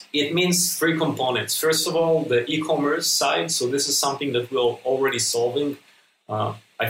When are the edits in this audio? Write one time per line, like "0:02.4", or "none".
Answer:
none